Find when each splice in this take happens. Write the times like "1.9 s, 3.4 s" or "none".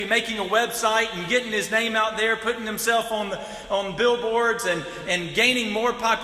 none